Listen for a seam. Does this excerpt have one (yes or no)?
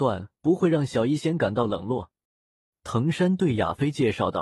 yes